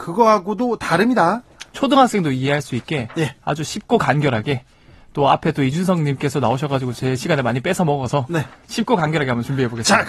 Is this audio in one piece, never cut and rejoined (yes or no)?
no